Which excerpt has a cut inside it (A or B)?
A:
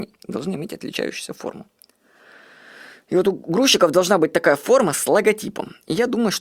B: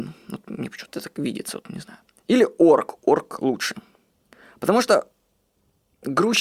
B